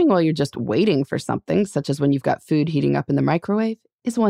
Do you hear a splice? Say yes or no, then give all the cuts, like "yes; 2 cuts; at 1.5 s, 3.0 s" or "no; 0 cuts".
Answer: no; 0 cuts